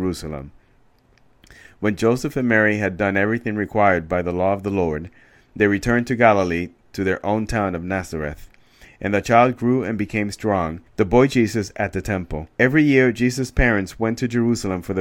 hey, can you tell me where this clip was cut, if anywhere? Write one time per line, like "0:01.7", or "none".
0:10.9
0:12.5